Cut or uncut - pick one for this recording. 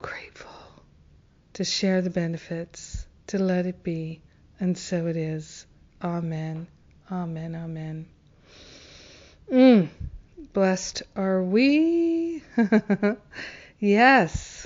uncut